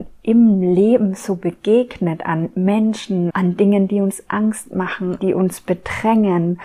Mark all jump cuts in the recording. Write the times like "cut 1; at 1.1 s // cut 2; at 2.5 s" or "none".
cut 1; at 3.3 s // cut 2; at 5.2 s